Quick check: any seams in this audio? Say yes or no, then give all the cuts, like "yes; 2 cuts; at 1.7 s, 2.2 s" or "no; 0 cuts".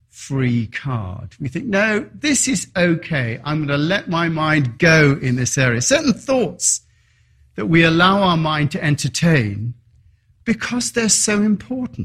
no; 0 cuts